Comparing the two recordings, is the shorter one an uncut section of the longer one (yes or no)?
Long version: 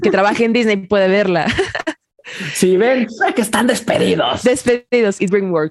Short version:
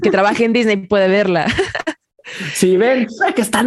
yes